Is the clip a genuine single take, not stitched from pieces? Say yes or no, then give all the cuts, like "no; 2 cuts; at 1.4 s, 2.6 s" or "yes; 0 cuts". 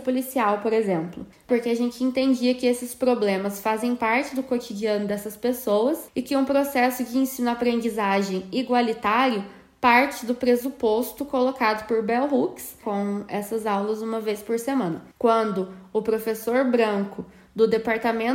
no; 2 cuts; at 12.8 s, 15.1 s